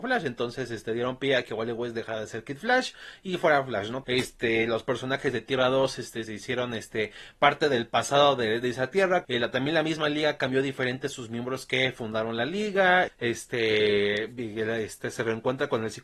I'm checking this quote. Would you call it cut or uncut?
cut